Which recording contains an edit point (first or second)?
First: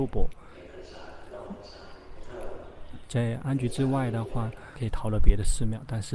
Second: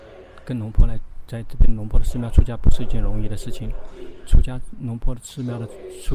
first